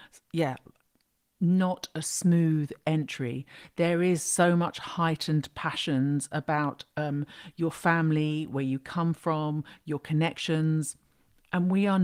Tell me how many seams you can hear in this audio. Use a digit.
0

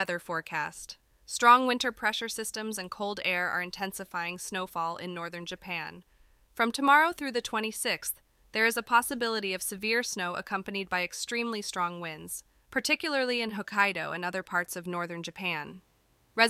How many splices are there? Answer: 0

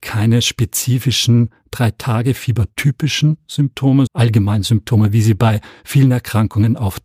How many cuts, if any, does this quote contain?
1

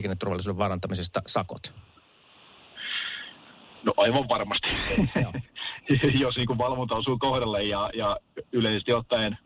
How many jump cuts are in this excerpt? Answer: 0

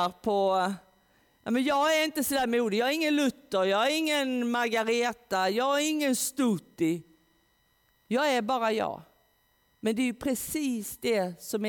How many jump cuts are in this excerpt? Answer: 0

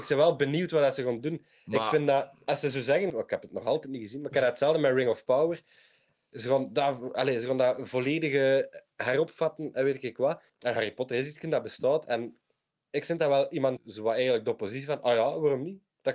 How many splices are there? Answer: 3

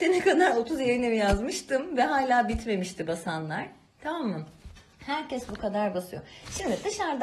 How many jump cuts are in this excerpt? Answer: 0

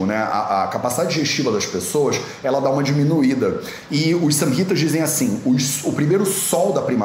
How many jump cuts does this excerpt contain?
1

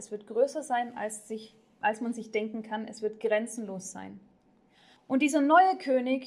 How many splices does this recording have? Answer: 1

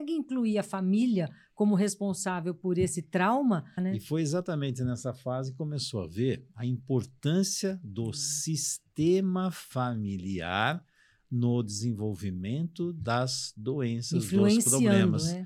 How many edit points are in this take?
1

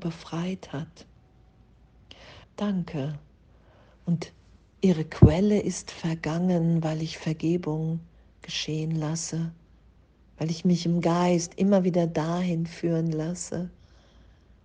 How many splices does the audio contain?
1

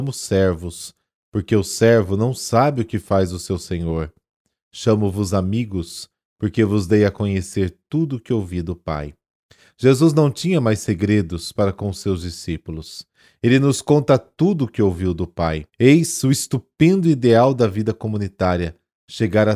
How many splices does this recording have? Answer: 1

